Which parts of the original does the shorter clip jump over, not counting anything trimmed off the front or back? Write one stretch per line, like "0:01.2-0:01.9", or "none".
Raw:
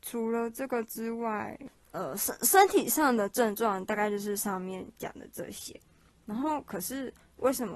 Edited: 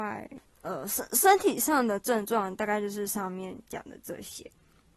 none